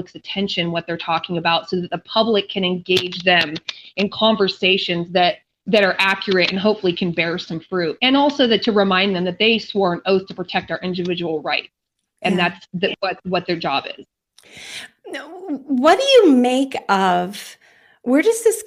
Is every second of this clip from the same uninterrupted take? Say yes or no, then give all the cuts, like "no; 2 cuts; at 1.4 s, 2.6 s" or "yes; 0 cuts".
no; 1 cut; at 5.6 s